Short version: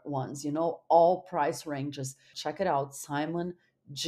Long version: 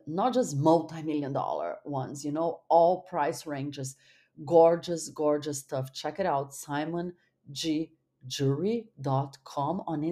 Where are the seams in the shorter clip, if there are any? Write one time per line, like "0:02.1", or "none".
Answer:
0:02.3